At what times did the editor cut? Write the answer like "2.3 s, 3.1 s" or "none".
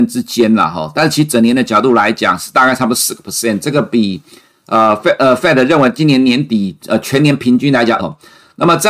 8.0 s